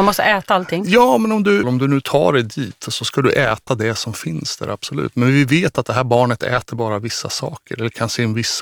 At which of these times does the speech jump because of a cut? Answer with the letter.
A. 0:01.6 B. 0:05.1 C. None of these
A